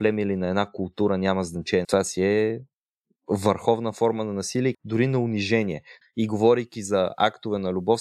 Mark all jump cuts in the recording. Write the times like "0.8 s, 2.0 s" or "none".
1.8 s, 4.7 s, 6.0 s